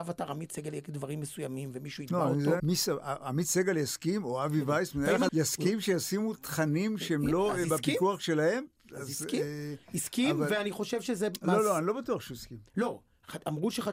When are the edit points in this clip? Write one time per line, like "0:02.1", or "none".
0:02.6
0:05.3

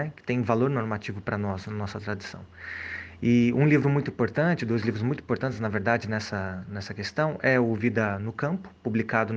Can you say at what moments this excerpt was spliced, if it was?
none

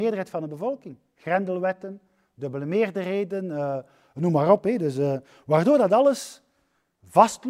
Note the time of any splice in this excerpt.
none

